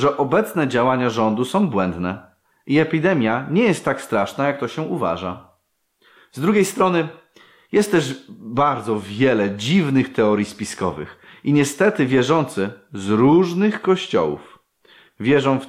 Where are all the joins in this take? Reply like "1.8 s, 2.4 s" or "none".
6.2 s